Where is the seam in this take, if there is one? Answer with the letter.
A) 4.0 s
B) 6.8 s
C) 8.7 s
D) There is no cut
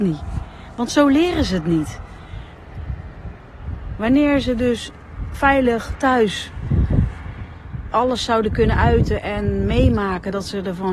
D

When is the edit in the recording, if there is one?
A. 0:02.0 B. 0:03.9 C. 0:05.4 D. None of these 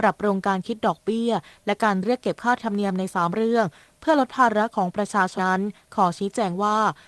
C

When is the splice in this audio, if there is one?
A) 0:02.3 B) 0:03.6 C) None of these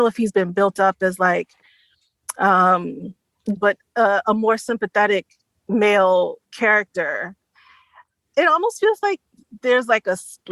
B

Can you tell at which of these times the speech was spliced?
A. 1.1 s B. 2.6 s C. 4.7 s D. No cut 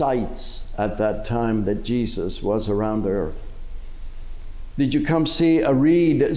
C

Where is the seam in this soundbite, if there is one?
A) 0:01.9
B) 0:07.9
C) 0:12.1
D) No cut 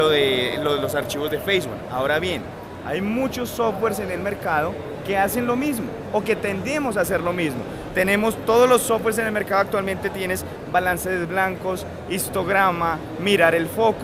D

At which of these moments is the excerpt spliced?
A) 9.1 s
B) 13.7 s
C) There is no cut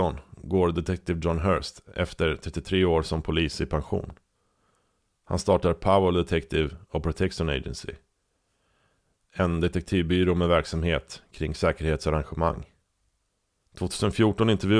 B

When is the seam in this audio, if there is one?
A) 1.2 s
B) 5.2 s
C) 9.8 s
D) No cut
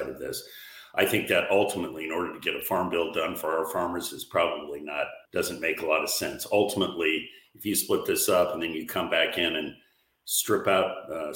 B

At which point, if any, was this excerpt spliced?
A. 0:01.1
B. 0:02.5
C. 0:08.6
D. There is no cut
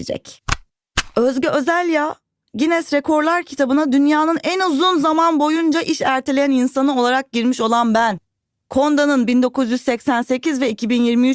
D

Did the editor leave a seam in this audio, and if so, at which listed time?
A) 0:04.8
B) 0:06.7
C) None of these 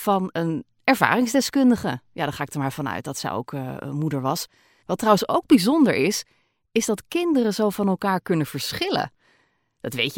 A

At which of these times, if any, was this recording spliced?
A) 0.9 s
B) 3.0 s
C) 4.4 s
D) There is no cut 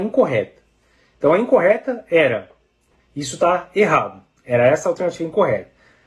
B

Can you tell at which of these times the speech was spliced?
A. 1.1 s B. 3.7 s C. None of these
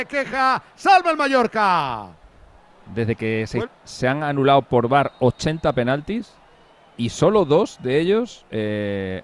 B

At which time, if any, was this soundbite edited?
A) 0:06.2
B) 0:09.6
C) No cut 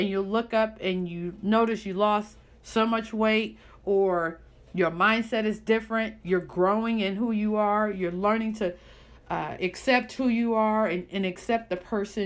C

